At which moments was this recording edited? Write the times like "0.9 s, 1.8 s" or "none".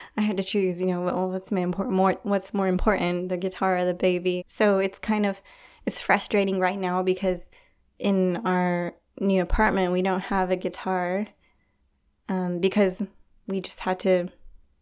4.4 s